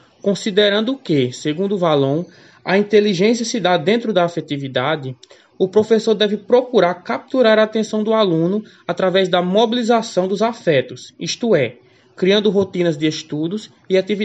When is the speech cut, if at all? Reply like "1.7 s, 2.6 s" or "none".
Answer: none